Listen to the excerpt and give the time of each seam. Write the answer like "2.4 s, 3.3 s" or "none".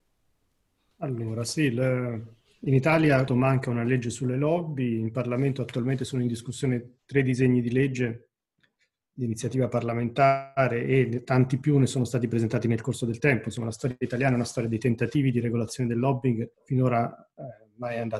3.3 s, 16.5 s

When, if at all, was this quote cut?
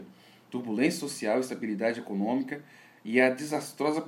none

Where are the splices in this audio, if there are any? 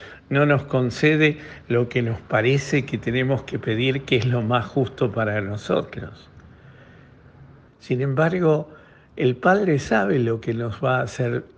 7.7 s

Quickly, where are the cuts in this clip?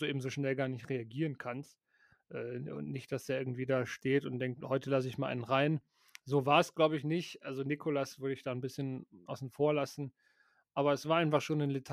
4.6 s, 9.3 s

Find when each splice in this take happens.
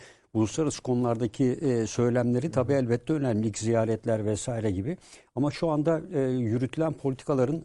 none

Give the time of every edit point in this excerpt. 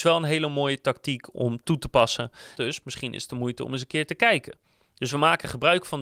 2.5 s

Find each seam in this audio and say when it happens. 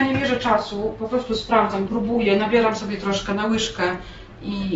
1.9 s

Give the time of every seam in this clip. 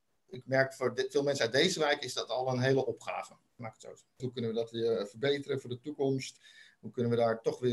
4.2 s

